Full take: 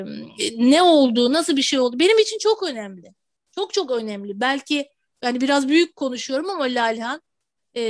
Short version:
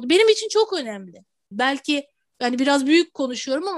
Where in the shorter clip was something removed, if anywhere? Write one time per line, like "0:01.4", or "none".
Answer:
0:01.5